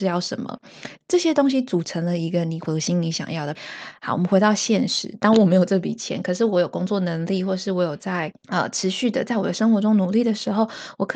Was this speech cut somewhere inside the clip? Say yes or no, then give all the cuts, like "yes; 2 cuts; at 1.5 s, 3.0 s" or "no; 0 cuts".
no; 0 cuts